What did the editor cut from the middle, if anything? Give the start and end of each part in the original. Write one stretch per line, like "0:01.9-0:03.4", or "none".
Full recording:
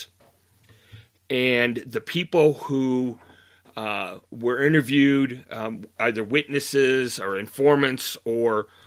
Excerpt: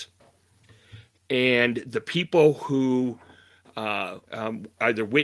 0:04.3-0:05.4